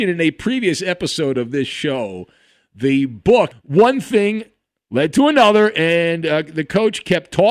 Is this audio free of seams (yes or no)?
no